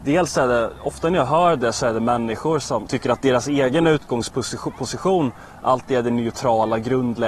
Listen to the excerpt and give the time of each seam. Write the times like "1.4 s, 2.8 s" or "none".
2.9 s